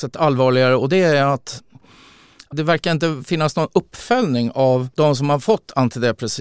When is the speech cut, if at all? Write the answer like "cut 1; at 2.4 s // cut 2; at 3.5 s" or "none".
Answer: none

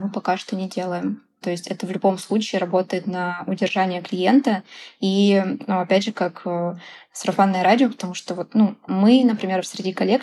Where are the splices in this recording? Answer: cut 1; at 1.4 s

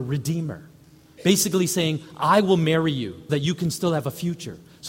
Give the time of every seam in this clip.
cut 1; at 3.3 s

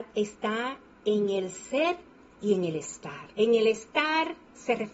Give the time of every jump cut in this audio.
cut 1; at 3.3 s

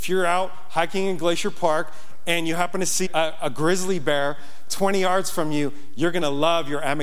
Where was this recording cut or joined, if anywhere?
cut 1; at 3.1 s

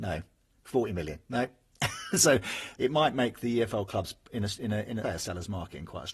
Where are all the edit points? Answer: cut 1; at 2.8 s // cut 2; at 5.0 s

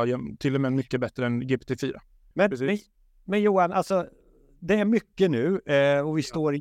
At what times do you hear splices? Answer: cut 1; at 2.3 s

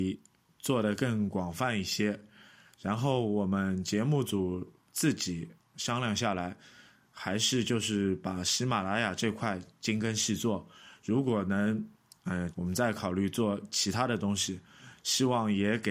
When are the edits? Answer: cut 1; at 12.5 s // cut 2; at 15.0 s

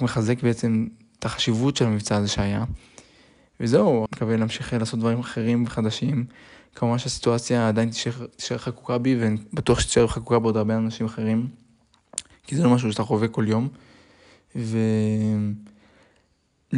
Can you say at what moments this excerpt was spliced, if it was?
cut 1; at 4.1 s

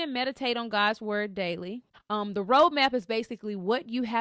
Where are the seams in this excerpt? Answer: cut 1; at 1.9 s

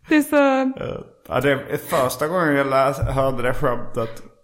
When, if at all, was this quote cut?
none

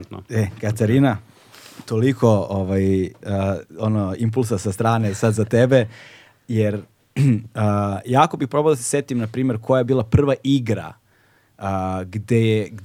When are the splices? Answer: none

